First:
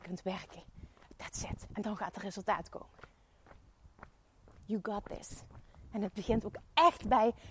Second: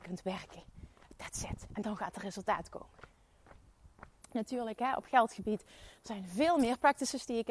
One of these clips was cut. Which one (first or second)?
second